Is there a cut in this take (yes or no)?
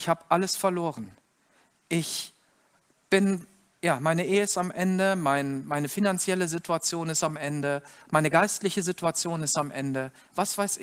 no